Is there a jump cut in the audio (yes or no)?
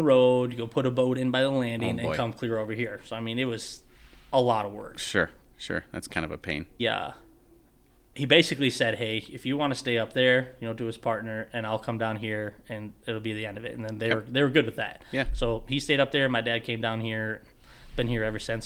yes